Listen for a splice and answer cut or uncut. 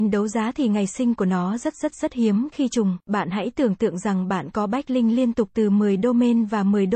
uncut